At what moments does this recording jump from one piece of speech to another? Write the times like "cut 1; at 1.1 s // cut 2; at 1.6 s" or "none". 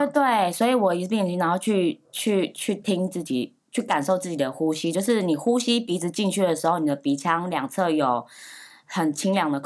none

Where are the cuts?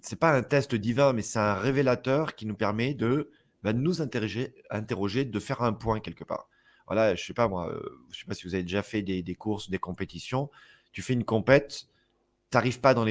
none

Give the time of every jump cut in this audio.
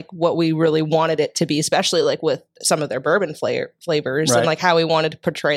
none

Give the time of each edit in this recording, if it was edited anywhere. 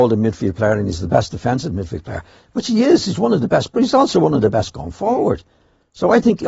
none

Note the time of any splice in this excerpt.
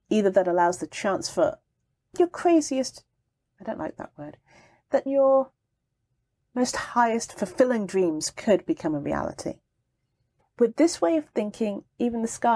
cut 1; at 5.1 s // cut 2; at 10.4 s

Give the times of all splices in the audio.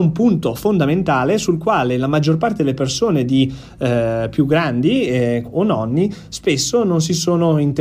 cut 1; at 5.4 s

